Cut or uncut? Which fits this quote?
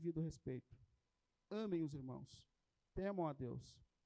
uncut